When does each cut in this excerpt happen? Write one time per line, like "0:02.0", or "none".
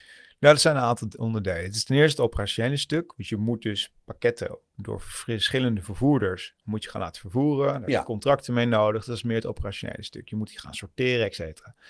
none

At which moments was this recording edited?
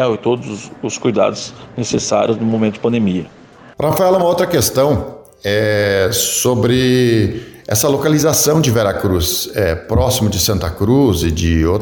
none

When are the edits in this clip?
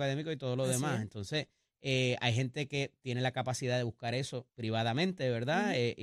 0:04.5

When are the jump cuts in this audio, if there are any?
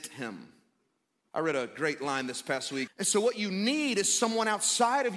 0:01.3
0:02.9

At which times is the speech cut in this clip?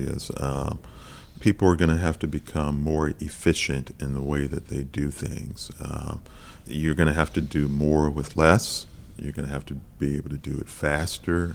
none

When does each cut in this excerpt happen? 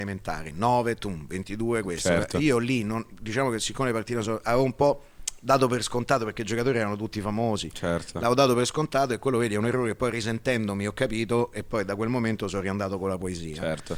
none

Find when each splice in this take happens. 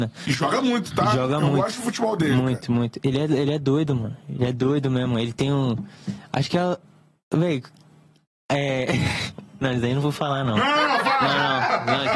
none

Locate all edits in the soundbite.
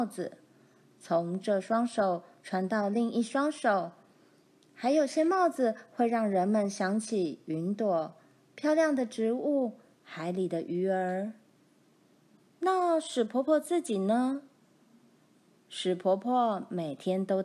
none

